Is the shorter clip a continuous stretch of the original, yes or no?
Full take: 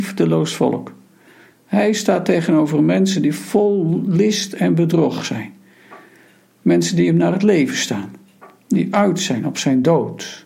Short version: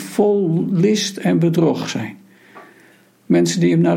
yes